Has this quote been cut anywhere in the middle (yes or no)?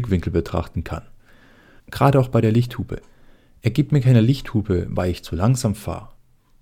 yes